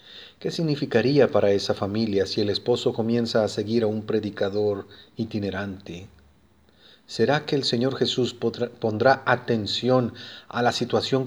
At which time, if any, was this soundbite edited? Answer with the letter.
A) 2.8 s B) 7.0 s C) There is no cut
C